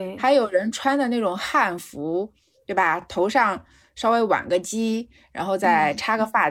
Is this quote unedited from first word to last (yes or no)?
yes